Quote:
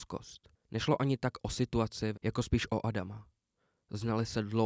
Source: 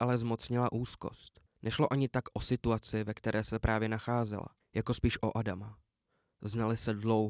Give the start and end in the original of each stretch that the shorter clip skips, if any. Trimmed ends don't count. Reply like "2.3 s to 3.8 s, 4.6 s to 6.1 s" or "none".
3.0 s to 4.6 s